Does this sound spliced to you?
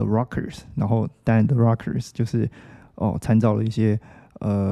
no; 0 cuts

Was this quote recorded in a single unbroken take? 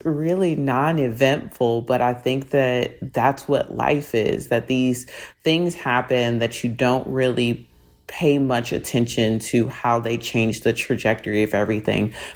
yes; 0 cuts

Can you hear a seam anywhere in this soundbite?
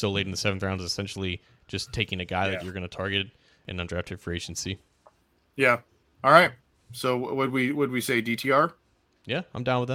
no; 0 cuts

